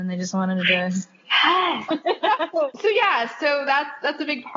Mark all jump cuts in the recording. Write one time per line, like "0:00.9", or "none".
0:01.9